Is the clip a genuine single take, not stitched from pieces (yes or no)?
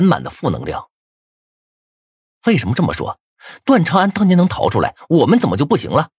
yes